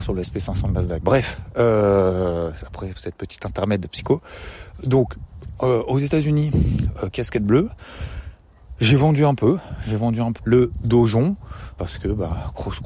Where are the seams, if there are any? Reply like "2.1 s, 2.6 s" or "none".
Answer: 1.0 s, 10.4 s, 11.8 s